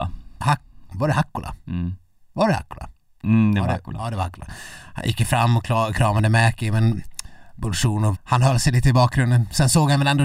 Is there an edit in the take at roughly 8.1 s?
yes; 1 cut; at 8.1 s

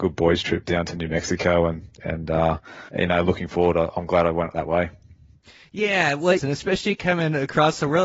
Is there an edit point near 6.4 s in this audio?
yes; 2 cuts; at 2.9 s, 6.4 s

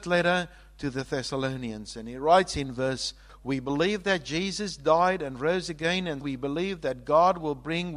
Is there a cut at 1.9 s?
no; 2 cuts; at 3.3 s, 6.2 s

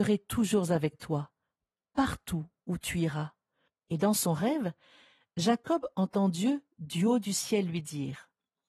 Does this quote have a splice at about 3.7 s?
yes; 1 cut; at 3.7 s

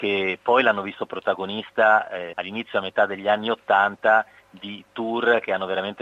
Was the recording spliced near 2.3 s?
yes; 1 cut; at 2.3 s

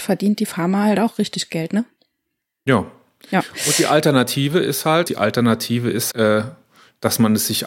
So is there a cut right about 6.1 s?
yes; 2 cuts; at 5.1 s, 6.1 s

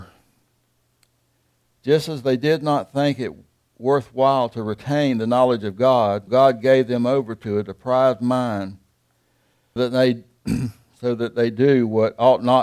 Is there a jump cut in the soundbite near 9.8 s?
yes; 2 cuts; at 6.3 s, 9.8 s

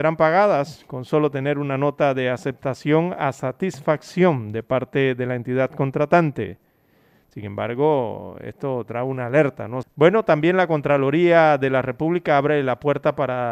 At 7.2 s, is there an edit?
no; 1 cut; at 9.8 s

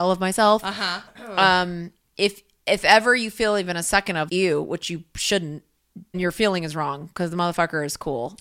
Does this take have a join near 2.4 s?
no; 3 cuts; at 1.1 s, 4.3 s, 6.1 s

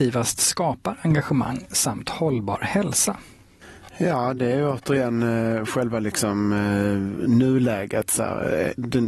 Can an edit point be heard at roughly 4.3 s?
no; 0 cuts

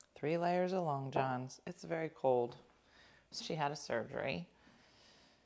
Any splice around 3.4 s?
yes; 1 cut; at 3.4 s

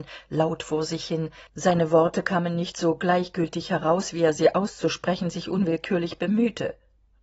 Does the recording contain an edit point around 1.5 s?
yes; 1 cut; at 1.5 s

